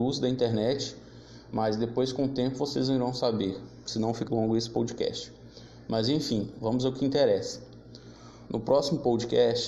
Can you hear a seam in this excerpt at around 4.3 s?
yes; 1 cut; at 4.3 s

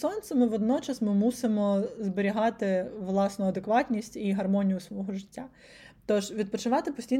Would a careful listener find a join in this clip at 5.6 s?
no; 0 cuts

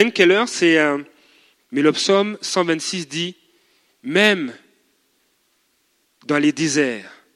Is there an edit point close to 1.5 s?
yes; 1 cut; at 1.5 s

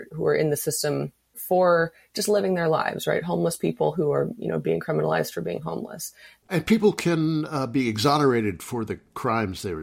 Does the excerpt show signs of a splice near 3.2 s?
no; 1 cut; at 6.4 s

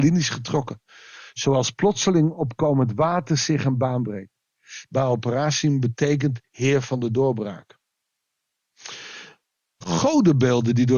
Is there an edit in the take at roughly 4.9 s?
yes; 1 cut; at 4.9 s

